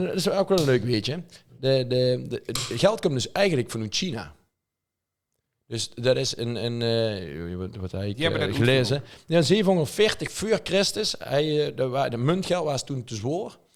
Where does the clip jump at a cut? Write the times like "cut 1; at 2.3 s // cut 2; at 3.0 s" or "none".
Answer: none

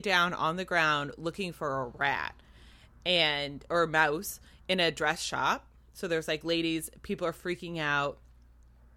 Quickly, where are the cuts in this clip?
none

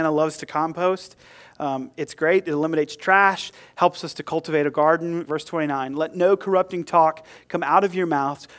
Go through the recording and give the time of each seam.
cut 1; at 5.3 s

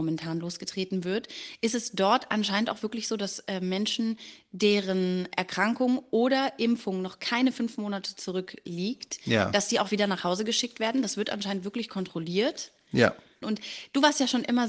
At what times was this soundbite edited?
cut 1; at 13.4 s

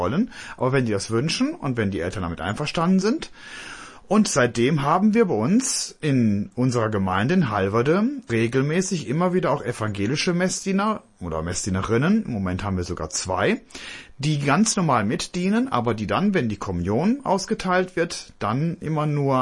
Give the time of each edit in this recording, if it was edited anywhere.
none

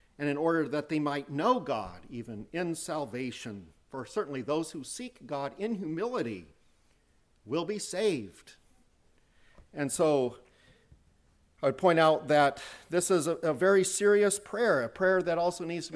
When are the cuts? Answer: none

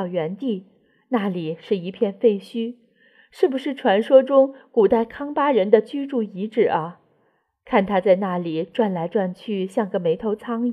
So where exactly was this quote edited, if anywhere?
none

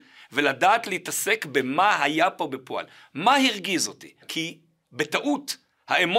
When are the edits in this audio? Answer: cut 1; at 4.2 s

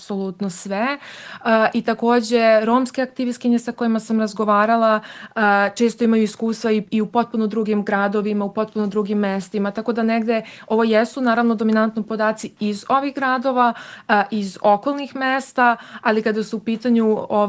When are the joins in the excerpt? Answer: none

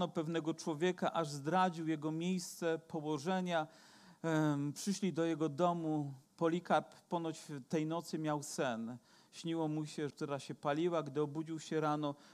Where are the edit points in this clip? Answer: cut 1; at 6.3 s // cut 2; at 10.1 s

